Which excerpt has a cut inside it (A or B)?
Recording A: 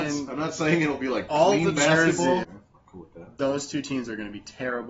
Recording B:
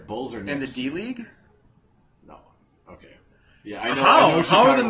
A